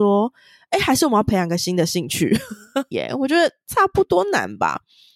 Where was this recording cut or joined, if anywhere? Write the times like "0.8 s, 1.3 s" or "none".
2.9 s